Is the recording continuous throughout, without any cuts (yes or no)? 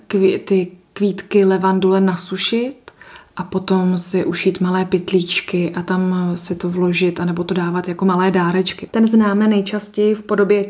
no